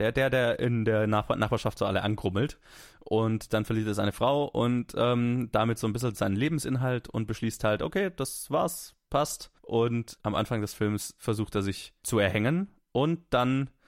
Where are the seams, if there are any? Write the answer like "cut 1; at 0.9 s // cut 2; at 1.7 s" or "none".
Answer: cut 1; at 9.6 s